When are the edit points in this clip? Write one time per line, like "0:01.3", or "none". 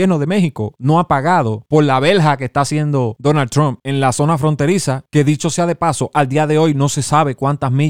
none